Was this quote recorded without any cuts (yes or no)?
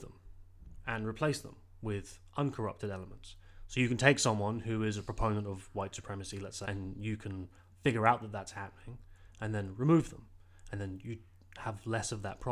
no